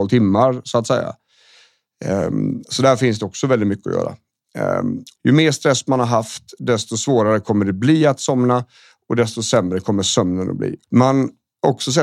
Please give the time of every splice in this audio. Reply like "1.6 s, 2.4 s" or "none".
5.2 s, 10.8 s

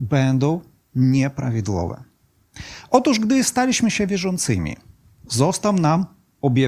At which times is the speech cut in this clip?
none

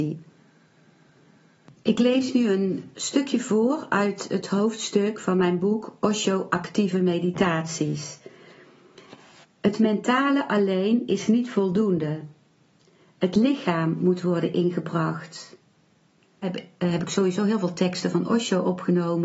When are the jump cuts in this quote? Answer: 9.4 s, 16.4 s

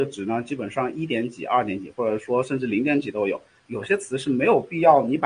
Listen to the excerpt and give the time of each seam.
3.7 s

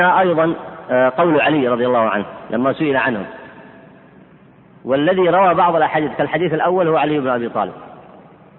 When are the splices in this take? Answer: none

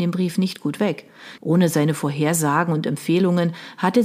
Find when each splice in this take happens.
1.4 s

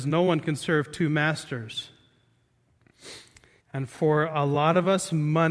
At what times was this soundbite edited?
3.6 s

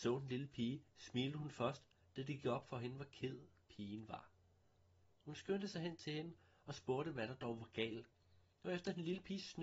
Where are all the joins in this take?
2.0 s

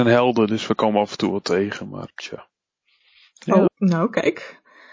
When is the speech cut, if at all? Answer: 2.1 s, 3.7 s

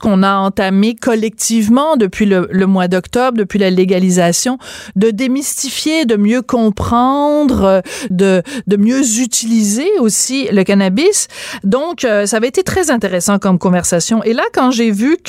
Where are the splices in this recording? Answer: 8.1 s

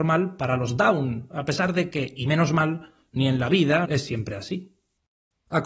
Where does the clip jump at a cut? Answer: 3.9 s

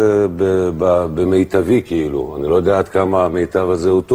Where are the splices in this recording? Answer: none

